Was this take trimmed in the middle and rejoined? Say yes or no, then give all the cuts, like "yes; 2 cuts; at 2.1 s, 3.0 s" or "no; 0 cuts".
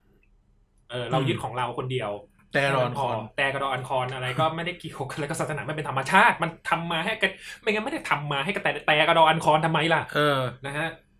no; 0 cuts